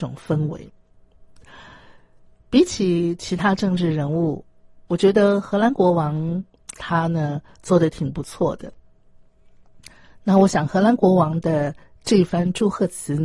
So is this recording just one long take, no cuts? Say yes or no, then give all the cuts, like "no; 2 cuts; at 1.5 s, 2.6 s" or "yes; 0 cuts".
no; 1 cut; at 6.7 s